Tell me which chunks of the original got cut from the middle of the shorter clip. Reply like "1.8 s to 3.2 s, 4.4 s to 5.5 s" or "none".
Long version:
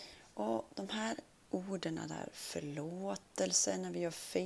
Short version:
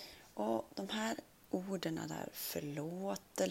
none